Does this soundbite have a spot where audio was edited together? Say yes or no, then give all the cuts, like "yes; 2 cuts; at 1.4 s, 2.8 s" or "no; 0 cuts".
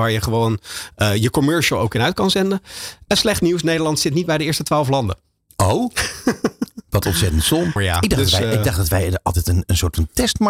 yes; 1 cut; at 7.8 s